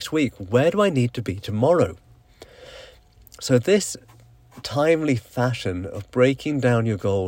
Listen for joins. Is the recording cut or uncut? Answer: uncut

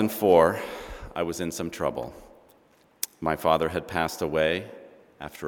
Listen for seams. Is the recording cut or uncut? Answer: uncut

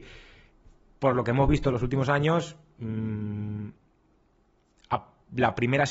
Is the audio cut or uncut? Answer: uncut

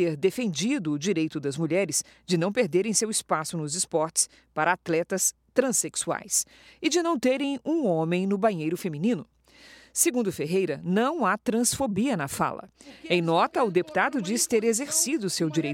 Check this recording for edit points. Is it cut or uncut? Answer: uncut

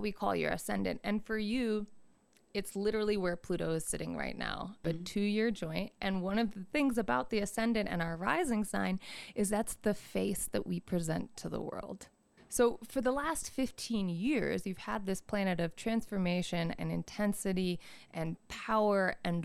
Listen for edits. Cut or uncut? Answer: cut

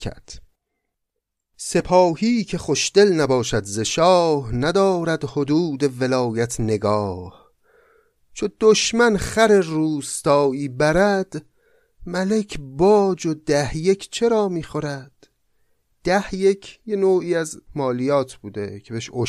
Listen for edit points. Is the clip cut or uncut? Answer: uncut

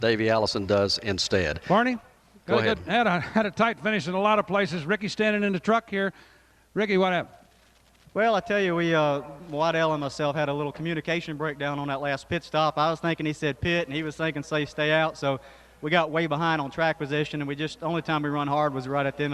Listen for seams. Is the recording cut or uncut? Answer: uncut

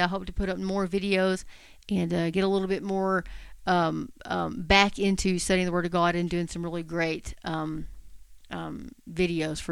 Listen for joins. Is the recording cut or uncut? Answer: uncut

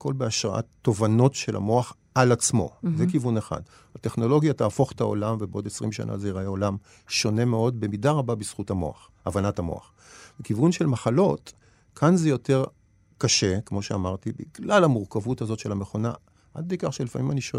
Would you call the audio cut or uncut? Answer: uncut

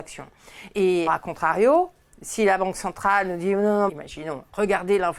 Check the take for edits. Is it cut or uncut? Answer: cut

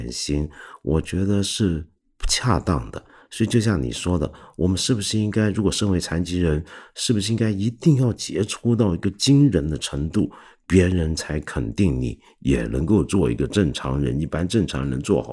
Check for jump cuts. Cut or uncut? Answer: uncut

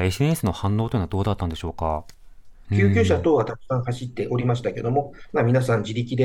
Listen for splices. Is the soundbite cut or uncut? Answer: cut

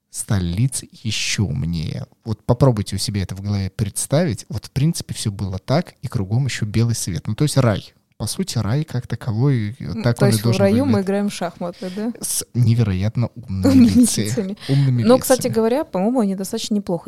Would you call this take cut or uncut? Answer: uncut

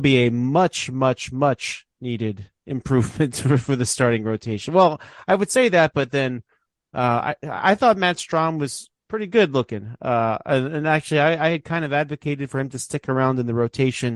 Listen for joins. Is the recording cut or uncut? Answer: uncut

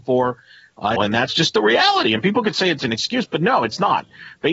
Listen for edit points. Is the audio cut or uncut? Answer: cut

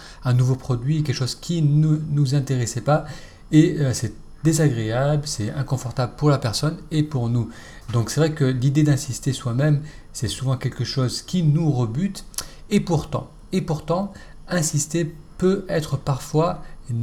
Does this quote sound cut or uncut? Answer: uncut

